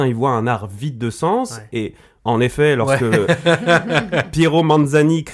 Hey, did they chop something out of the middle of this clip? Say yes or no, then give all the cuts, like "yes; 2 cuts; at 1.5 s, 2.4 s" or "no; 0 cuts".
yes; 1 cut; at 2.2 s